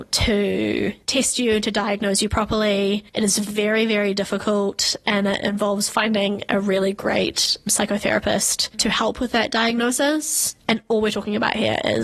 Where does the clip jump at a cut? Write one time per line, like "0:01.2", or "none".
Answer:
none